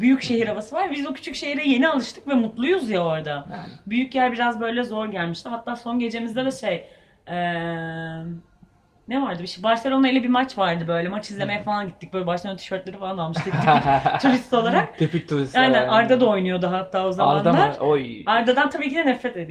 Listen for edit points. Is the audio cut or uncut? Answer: uncut